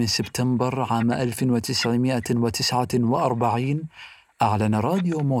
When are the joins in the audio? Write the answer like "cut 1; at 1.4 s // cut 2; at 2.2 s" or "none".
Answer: none